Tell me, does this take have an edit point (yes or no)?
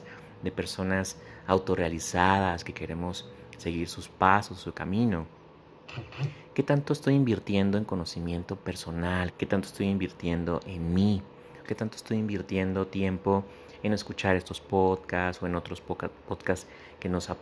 yes